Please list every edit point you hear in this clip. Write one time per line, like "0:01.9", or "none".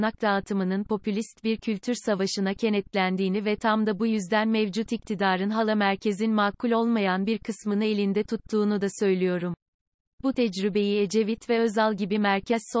none